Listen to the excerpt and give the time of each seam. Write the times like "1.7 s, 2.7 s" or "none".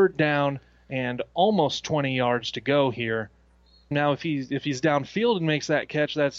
3.9 s